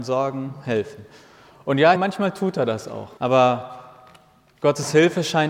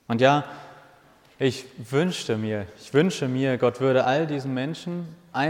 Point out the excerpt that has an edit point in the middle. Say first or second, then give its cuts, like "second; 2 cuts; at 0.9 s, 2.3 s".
first; 2 cuts; at 2.0 s, 3.2 s